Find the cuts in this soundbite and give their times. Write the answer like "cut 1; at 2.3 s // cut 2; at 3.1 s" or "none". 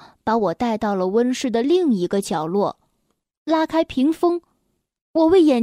none